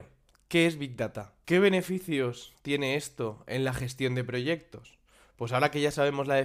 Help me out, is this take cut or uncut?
cut